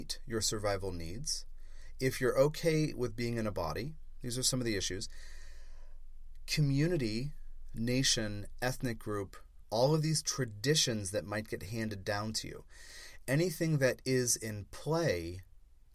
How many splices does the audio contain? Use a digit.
2